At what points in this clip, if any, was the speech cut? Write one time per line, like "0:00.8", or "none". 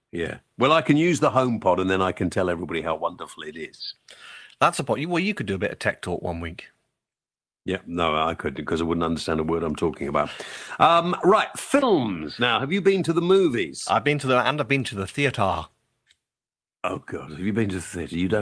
none